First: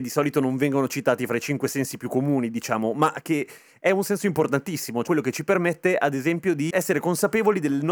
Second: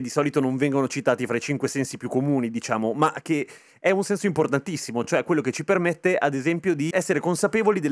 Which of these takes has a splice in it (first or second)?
first